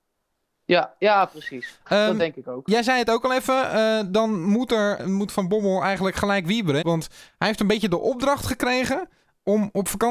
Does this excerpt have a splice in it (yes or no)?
yes